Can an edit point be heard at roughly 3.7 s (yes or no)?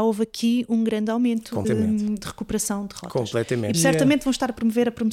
yes